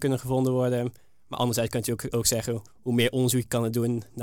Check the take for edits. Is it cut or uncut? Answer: cut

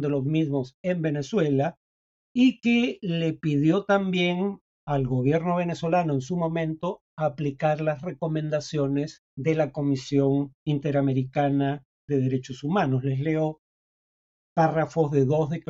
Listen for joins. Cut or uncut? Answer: cut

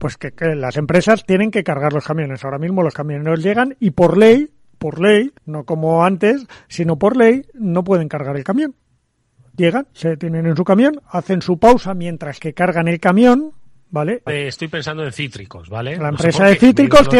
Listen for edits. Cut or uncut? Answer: cut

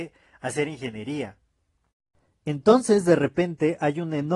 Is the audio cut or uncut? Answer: uncut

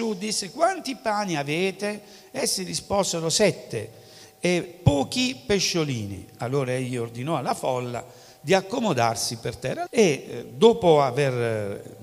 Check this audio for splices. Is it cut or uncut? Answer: cut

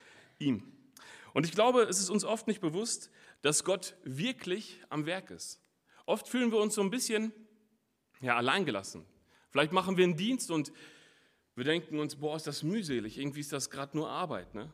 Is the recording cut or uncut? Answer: uncut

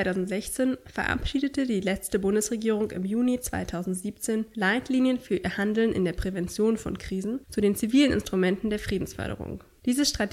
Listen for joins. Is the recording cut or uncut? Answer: uncut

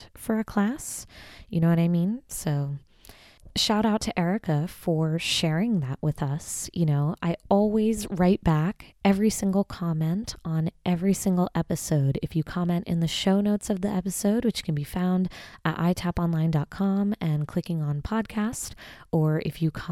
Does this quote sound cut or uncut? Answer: uncut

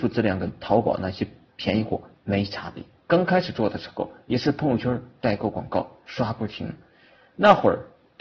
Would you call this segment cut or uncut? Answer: cut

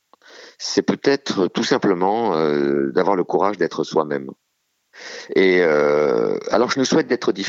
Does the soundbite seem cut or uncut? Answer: uncut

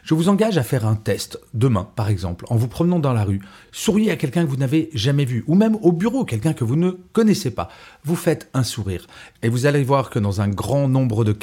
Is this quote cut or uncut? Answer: uncut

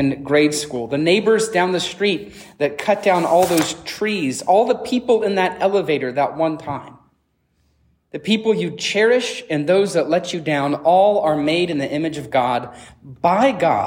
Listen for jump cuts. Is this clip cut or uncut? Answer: uncut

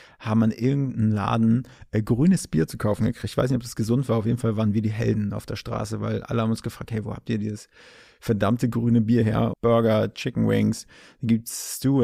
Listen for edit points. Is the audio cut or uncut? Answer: cut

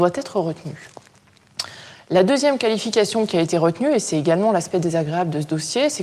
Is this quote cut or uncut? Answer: uncut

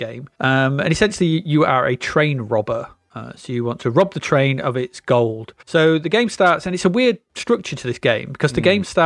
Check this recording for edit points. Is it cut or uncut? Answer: uncut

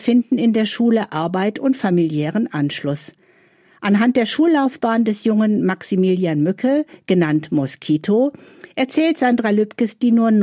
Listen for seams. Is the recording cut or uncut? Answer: uncut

